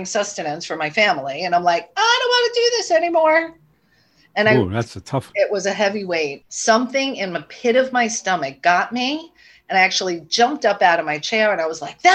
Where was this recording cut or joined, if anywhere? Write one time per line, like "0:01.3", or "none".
0:05.3
0:06.4